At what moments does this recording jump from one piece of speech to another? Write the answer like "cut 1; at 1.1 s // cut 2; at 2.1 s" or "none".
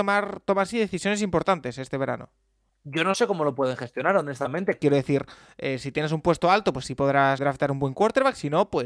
cut 1; at 2.7 s // cut 2; at 4.8 s // cut 3; at 7.4 s